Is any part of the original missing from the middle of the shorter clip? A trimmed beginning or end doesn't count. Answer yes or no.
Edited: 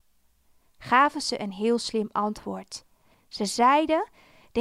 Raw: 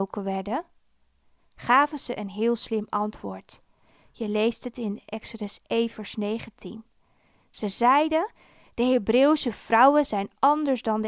yes